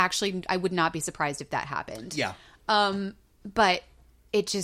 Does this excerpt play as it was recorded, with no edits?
yes; 0 cuts

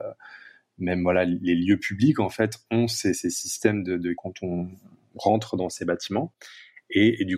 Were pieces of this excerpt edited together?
yes; 1 cut; at 4.2 s

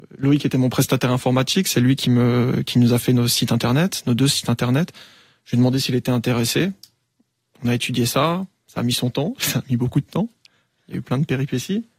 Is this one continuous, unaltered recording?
yes; 0 cuts

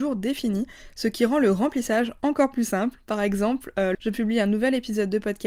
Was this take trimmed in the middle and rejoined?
yes; 1 cut; at 3.9 s

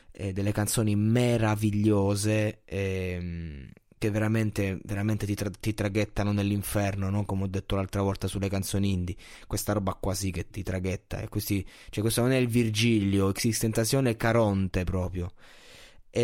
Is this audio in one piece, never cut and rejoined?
no; 1 cut; at 10.5 s

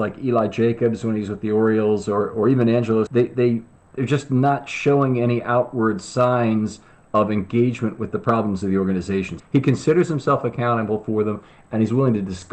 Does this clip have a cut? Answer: yes; 2 cuts; at 3.1 s, 9.4 s

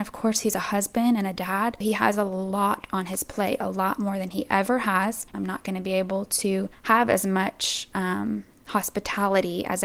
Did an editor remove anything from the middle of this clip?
yes; 1 cut; at 5.3 s

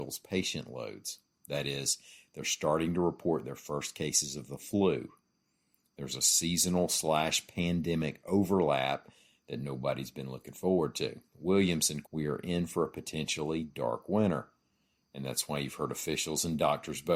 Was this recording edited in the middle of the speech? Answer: yes; 1 cut; at 12.0 s

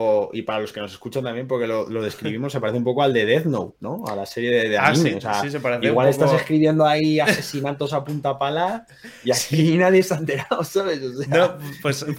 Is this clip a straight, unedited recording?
yes; 0 cuts

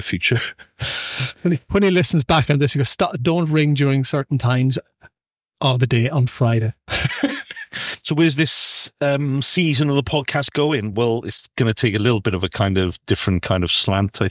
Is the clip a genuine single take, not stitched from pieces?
yes; 0 cuts

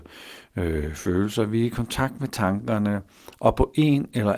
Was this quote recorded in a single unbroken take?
yes; 0 cuts

